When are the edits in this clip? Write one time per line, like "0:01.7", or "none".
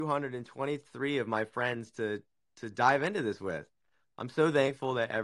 none

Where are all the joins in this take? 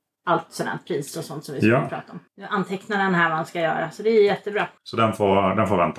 0:02.3
0:04.8

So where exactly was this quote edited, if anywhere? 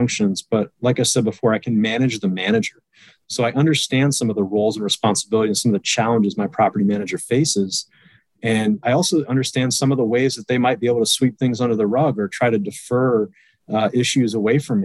none

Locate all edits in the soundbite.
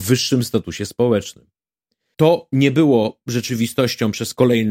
0:02.1

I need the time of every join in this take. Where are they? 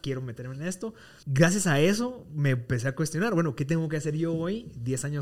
0:01.2

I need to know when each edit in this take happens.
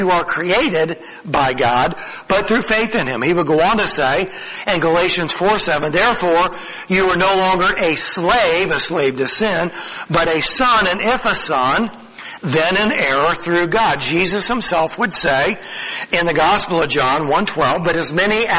none

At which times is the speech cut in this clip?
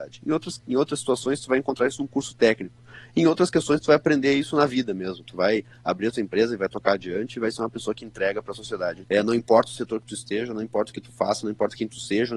0:09.0

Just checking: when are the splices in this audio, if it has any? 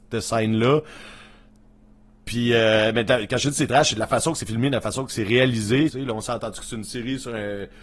0:05.9

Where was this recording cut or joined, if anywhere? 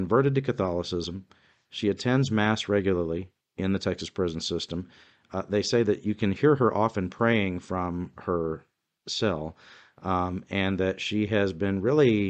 none

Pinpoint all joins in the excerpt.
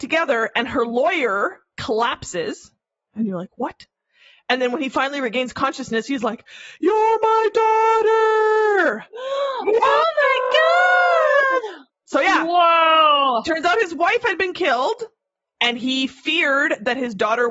none

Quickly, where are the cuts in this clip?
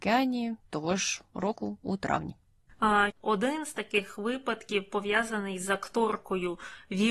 0:03.1

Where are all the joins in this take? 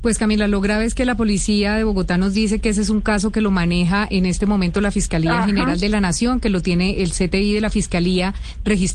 none

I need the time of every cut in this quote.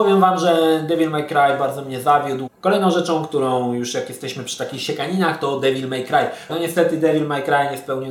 0:02.5
0:06.5

